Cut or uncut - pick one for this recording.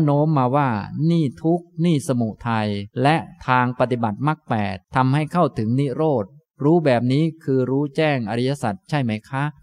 cut